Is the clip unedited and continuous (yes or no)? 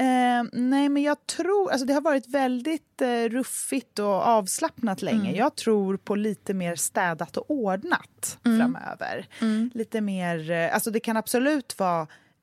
yes